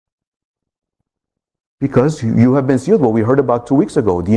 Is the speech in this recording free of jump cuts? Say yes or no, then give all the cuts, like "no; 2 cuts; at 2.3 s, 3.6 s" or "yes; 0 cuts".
yes; 0 cuts